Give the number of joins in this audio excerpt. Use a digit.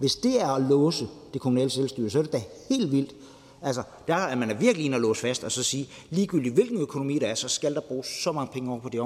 0